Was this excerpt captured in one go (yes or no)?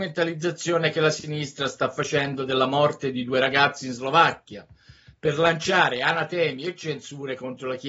yes